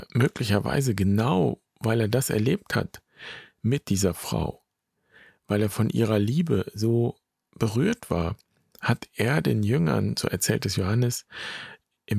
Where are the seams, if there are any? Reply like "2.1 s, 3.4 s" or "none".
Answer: none